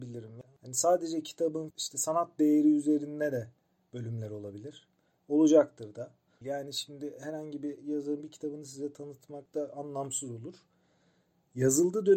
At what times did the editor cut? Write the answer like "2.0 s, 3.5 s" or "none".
1.7 s, 6.4 s

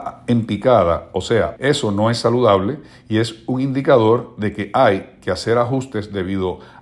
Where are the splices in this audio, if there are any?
1.6 s

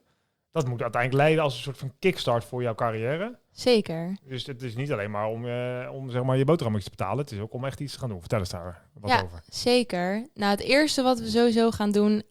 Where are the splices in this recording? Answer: none

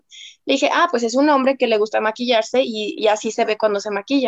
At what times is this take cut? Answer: 3.0 s

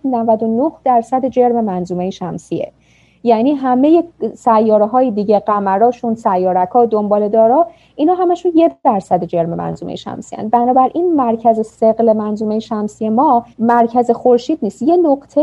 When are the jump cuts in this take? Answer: 13.5 s

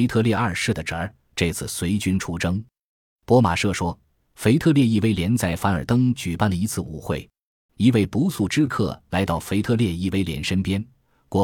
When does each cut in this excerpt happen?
4.2 s, 7.7 s

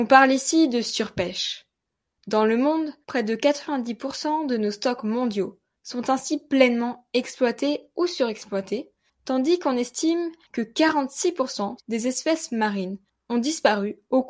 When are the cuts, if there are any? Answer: 3.0 s, 11.8 s

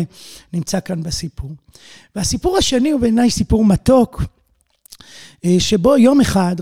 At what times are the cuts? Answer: none

